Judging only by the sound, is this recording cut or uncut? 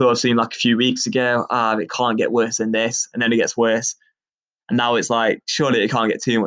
uncut